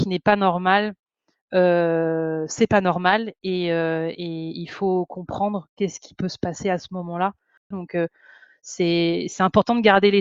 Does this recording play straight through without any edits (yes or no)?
no